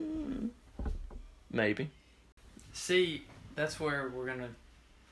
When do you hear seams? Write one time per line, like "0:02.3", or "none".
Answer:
0:02.6

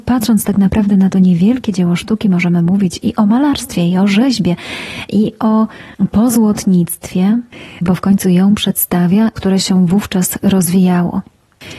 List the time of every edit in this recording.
0:07.8
0:09.4

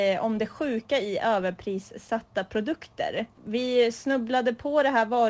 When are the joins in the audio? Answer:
none

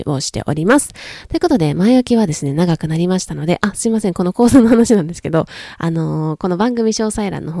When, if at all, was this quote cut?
none

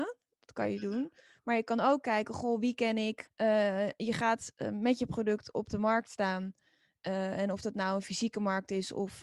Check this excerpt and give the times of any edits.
0:03.3

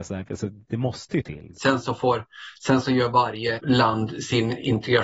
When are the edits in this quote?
0:01.5
0:03.6

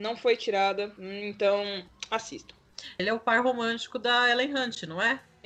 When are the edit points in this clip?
0:03.0

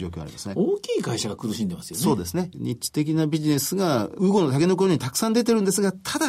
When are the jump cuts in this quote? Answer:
0:02.5
0:04.2

